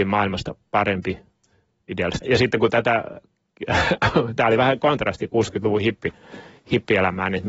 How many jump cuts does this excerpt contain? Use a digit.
2